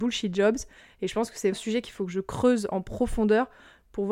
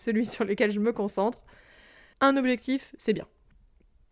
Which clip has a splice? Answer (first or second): first